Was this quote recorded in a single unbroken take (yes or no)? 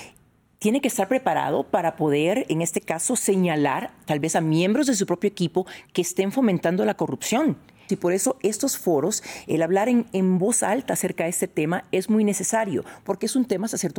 no